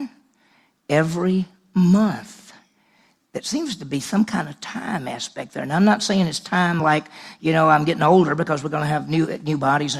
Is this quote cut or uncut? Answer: uncut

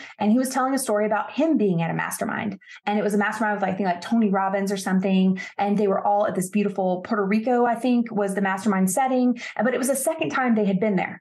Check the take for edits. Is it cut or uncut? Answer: uncut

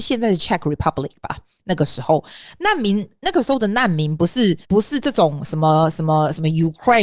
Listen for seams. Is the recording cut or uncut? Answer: cut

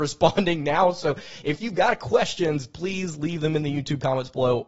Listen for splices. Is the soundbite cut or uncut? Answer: uncut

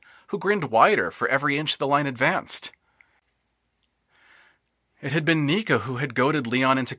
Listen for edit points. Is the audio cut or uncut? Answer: uncut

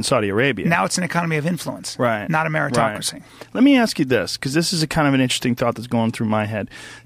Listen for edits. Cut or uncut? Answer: uncut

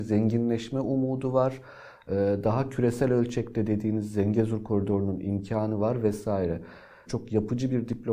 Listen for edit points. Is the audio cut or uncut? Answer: cut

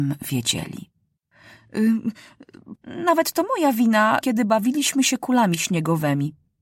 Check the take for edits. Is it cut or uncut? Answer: cut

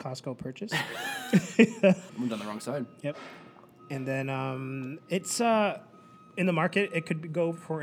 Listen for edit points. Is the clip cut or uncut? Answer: cut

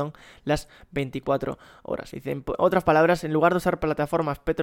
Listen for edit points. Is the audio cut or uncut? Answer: cut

